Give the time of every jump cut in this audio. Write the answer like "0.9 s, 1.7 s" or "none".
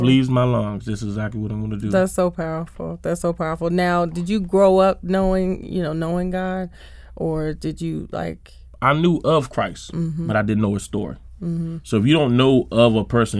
none

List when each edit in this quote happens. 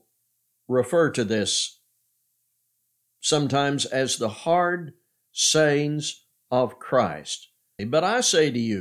7.8 s

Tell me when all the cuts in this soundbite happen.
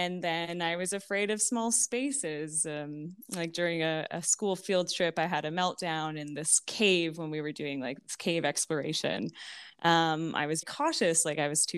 10.6 s

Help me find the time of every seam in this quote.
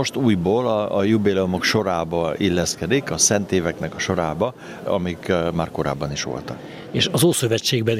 none

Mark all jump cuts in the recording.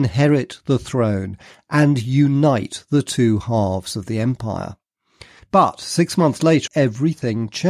5.4 s, 6.7 s

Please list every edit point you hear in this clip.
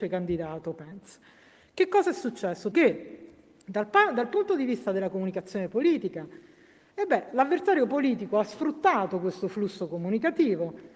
2.7 s

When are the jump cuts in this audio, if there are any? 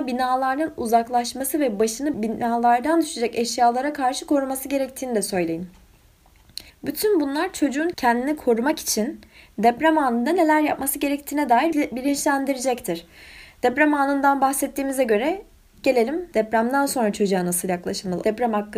6.7 s

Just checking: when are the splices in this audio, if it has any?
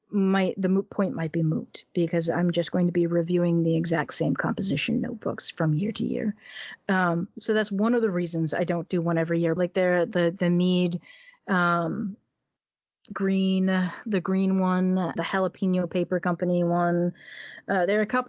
9.6 s, 15.2 s

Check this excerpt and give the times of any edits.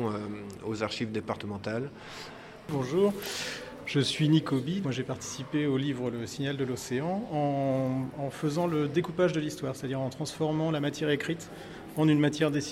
4.8 s

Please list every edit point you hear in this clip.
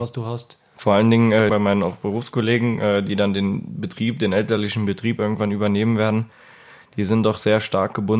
1.5 s

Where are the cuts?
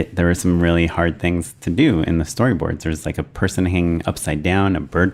none

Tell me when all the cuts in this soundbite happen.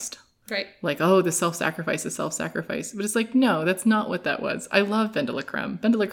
none

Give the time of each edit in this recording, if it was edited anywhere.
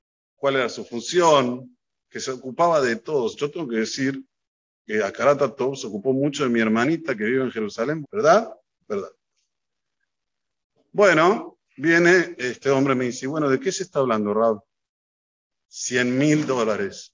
8.0 s, 11.7 s

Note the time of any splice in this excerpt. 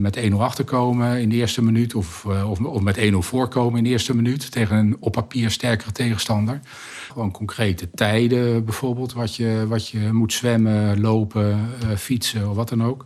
7.1 s

